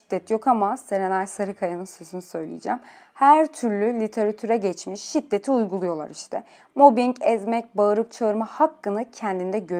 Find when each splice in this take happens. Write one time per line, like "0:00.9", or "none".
none